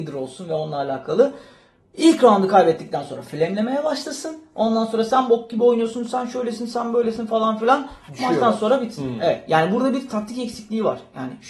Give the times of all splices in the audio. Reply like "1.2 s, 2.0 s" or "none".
none